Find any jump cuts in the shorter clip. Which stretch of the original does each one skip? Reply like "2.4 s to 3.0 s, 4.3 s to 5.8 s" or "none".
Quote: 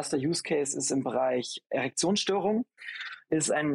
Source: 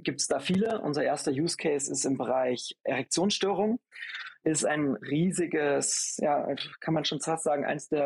none